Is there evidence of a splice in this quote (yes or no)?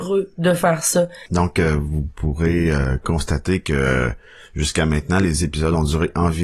yes